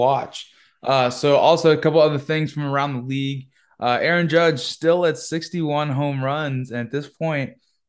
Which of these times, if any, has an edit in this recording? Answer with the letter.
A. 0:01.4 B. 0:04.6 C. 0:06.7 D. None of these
D